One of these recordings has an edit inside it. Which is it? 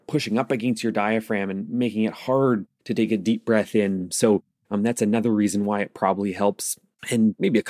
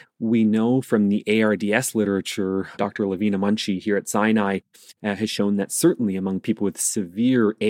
second; 1 cut; at 2.7 s

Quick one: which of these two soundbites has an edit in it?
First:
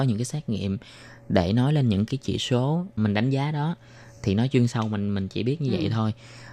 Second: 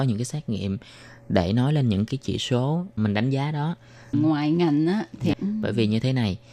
second; 2 cuts; at 4.1 s, 5.3 s

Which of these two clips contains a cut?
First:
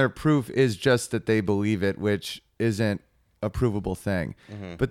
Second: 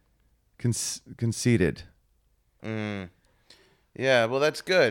second; 1 cut; at 2.6 s

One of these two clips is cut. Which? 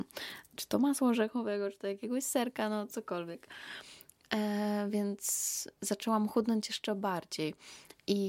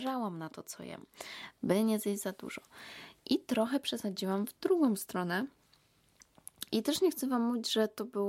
second; 1 cut; at 6.7 s

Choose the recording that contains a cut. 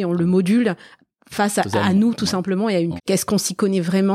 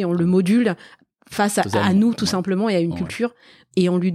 first; 1 cut; at 3.0 s

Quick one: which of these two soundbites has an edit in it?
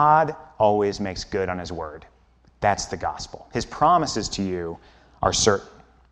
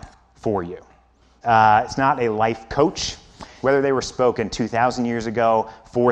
second; 2 cuts; at 1.4 s, 3.6 s

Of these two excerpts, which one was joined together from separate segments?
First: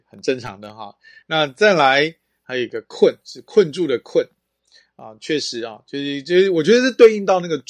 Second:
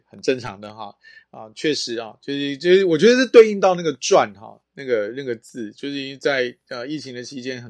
second; 1 cut; at 1.2 s

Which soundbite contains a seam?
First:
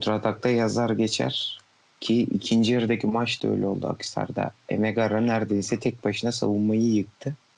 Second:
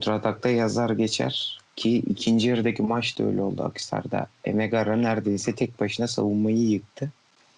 second; 1 cut; at 1.7 s

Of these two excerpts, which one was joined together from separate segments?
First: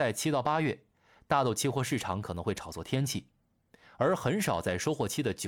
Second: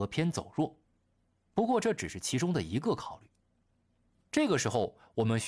second; 1 cut; at 4.3 s

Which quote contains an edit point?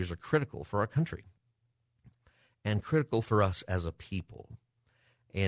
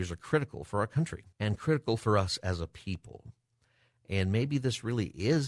second; 1 cut; at 1.3 s

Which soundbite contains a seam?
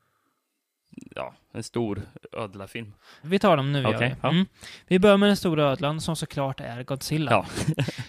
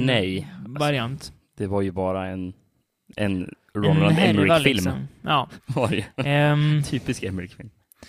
first; 1 cut; at 3.2 s

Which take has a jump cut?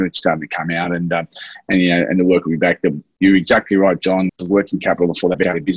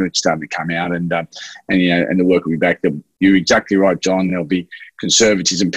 first; 1 cut; at 4.3 s

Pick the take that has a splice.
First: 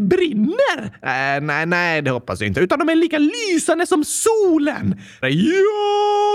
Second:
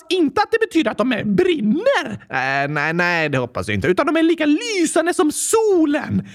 first; 1 cut; at 5.2 s

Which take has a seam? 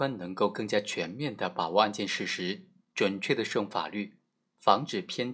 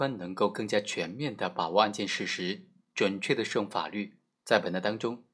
second; 1 cut; at 4.3 s

